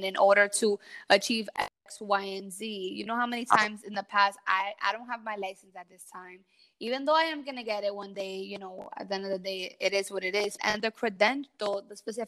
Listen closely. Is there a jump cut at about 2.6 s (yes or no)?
no